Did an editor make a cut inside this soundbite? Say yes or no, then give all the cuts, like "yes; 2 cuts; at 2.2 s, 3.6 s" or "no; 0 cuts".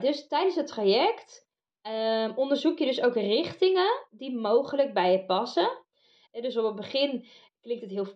yes; 1 cut; at 6.3 s